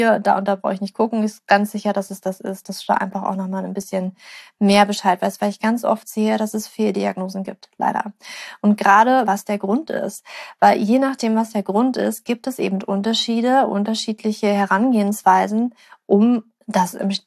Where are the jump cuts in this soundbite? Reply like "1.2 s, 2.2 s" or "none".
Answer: 9.3 s

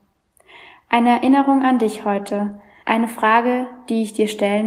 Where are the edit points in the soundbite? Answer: 2.8 s

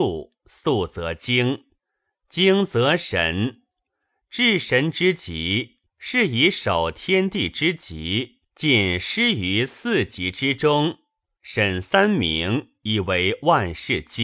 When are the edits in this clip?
5.9 s, 8.5 s, 11.3 s

